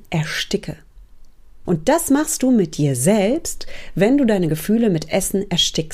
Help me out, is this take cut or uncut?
cut